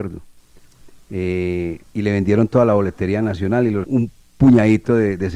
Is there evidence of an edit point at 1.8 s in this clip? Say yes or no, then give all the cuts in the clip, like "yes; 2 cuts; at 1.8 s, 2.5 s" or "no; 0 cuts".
yes; 2 cuts; at 1.8 s, 3.8 s